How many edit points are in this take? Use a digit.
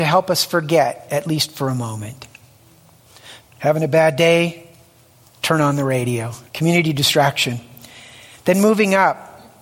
2